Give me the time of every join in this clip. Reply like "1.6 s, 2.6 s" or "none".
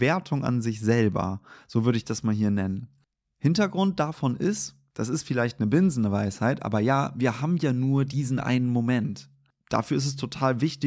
none